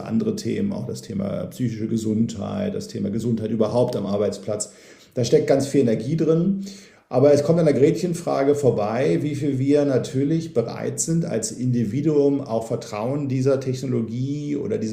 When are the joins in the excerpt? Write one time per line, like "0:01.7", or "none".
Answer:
none